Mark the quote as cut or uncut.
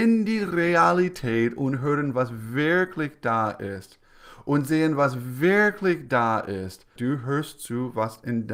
cut